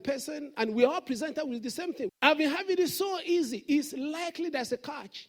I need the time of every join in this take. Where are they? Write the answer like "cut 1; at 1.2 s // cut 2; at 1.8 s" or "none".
cut 1; at 2.1 s